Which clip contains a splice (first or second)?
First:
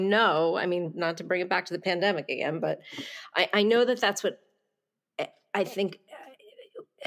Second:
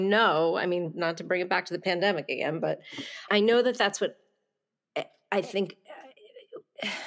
second